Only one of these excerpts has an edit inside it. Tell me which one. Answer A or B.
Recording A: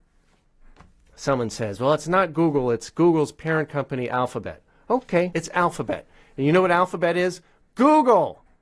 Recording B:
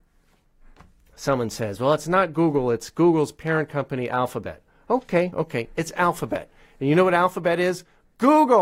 A